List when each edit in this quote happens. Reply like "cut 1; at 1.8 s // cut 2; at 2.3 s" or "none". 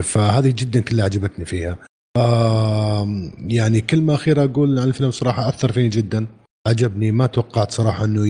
none